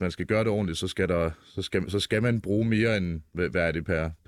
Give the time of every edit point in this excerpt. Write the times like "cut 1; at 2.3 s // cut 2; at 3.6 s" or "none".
none